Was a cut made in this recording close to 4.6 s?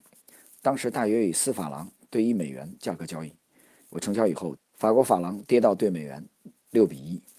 yes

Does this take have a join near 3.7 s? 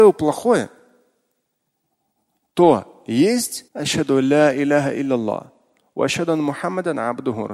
yes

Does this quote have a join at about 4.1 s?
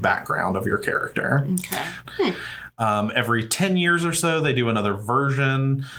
no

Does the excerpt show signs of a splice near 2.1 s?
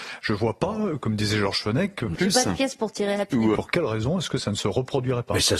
yes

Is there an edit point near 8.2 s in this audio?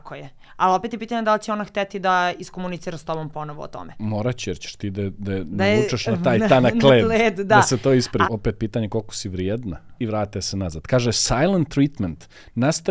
yes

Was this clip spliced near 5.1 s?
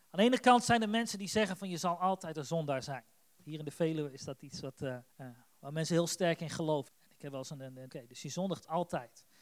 yes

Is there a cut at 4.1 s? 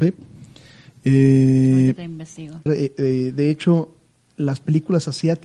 no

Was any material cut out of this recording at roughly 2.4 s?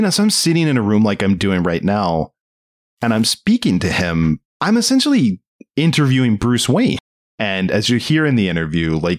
no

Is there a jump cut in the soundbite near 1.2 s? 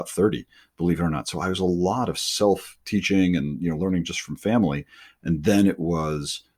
no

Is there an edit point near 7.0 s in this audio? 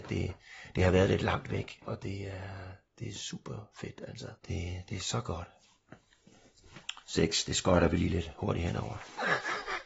yes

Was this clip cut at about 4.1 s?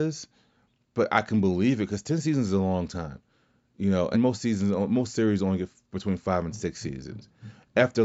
yes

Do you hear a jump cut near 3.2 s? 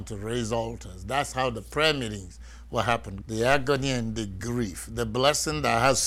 yes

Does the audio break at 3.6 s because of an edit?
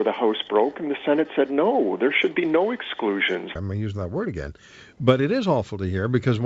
yes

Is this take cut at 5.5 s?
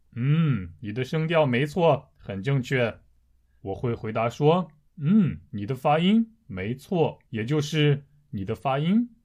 yes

